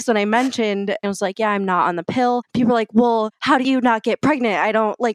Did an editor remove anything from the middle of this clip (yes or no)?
yes